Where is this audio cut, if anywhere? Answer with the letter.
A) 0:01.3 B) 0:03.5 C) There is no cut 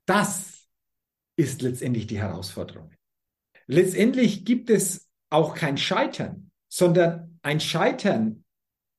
B